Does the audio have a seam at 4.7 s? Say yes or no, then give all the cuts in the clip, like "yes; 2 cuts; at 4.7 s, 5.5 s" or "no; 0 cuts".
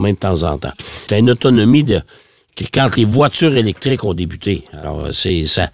no; 1 cut; at 1.1 s